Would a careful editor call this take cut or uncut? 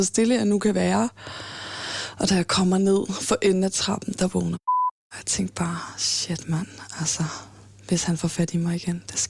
uncut